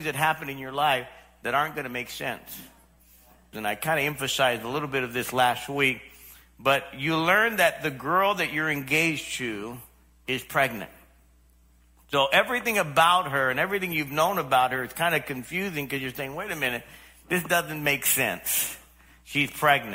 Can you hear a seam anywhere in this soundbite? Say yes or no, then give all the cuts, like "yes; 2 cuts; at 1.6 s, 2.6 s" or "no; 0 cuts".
yes; 1 cut; at 3.5 s